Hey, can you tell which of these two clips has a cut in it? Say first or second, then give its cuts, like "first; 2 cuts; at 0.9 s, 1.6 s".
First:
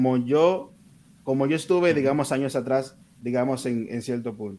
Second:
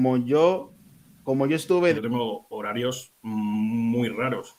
second; 1 cut; at 1.9 s